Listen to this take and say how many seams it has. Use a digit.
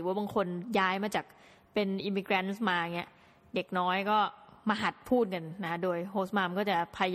0